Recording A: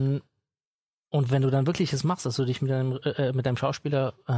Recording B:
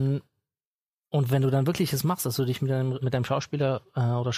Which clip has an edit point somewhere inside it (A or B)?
B